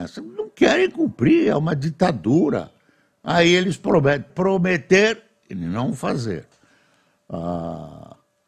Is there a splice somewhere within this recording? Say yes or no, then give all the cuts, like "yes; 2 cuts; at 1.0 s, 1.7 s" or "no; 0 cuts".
yes; 1 cut; at 4.3 s